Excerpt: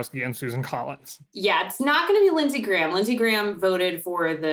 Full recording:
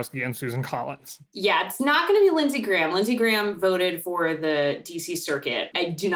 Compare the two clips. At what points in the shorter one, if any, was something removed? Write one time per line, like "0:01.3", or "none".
none